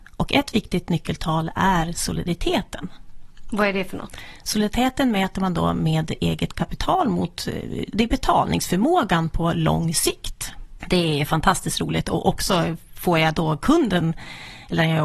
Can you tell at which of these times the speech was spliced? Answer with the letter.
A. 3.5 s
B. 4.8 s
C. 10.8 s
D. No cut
C